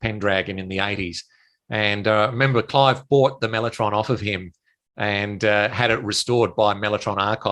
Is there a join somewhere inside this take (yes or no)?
no